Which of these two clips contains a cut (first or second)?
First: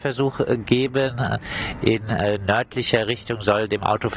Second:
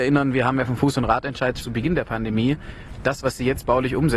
second